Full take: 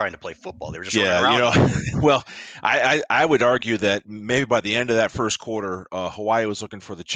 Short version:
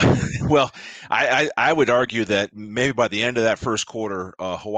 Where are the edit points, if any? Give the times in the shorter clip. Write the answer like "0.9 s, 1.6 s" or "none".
none